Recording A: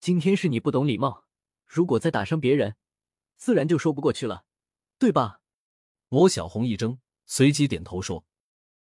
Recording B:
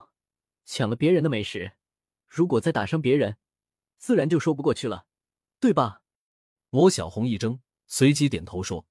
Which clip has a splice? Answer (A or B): A